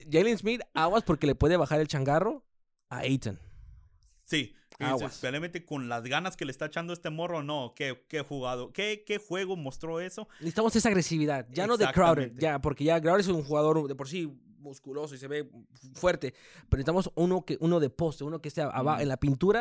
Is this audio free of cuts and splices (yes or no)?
yes